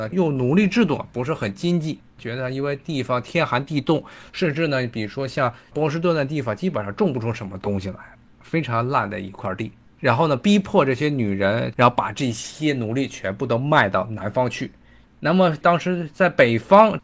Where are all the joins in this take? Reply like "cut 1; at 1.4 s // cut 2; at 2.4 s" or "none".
cut 1; at 9.8 s // cut 2; at 11.7 s // cut 3; at 15.1 s